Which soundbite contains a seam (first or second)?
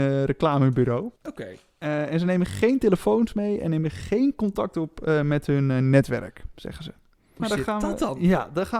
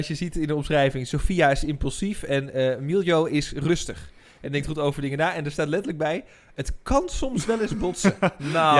first